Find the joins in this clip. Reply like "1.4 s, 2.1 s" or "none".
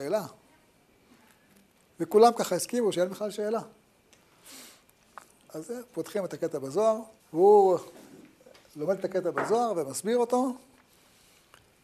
5.4 s, 7.2 s